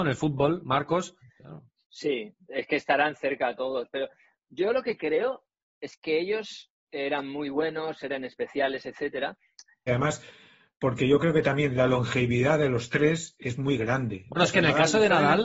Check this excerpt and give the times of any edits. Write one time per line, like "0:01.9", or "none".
0:01.2
0:09.9
0:14.3